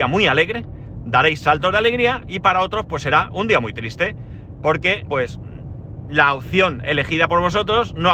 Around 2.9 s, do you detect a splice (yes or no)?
no